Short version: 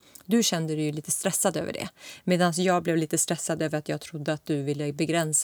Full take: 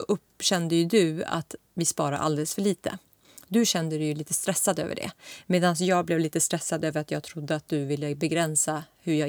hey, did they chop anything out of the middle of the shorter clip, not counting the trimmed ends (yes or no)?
no